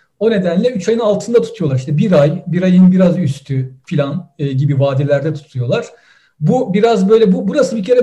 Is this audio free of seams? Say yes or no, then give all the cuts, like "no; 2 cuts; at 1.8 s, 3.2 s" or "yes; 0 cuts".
yes; 0 cuts